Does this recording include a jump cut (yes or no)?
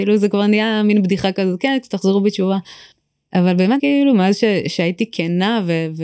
yes